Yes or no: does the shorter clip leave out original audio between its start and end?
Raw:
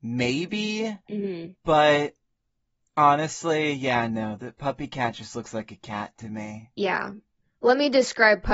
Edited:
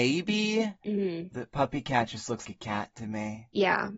yes